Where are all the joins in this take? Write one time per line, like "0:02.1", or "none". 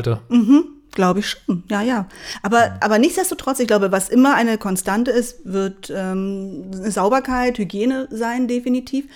none